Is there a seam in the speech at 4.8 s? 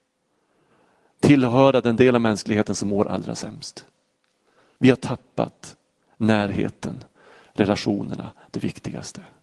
yes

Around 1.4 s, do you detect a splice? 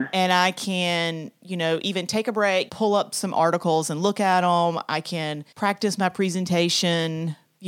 no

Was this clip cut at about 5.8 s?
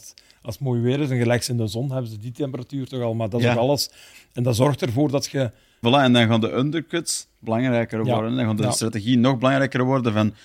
yes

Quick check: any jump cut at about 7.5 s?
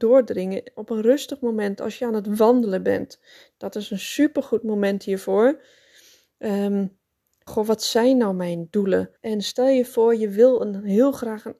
yes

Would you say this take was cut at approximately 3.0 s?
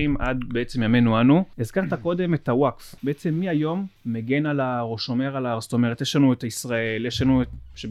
yes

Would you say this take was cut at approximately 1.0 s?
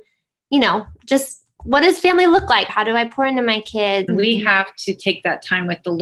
no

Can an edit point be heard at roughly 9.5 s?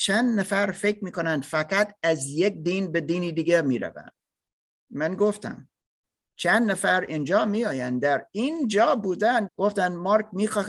yes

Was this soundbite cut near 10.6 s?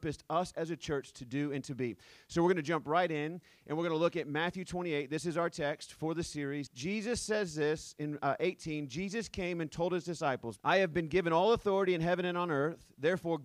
yes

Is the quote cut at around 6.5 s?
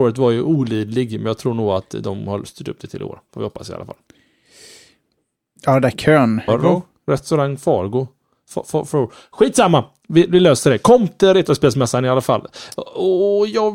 yes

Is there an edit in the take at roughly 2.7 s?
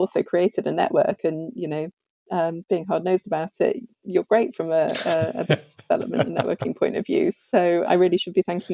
no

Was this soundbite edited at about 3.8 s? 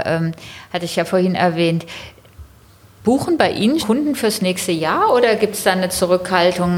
yes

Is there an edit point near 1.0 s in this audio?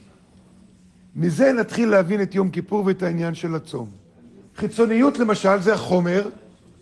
no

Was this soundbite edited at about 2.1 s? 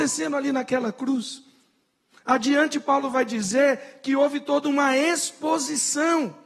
no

